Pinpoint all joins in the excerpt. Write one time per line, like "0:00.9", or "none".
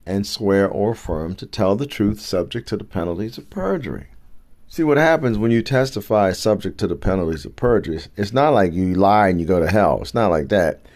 0:04.6